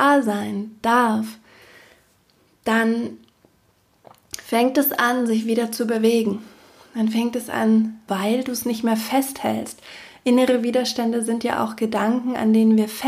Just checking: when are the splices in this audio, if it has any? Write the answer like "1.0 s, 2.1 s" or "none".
8.1 s